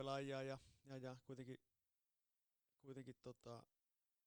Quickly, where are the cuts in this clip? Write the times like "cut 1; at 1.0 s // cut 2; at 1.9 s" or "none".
none